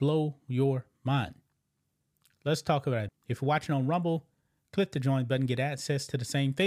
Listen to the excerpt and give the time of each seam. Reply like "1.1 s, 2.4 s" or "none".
3.1 s